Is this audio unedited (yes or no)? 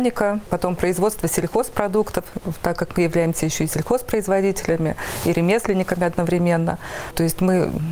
yes